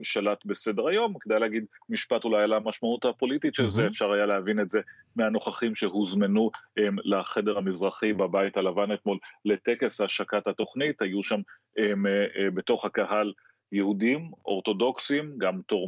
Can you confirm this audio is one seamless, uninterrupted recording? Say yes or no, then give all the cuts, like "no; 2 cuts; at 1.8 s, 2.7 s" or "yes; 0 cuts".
yes; 0 cuts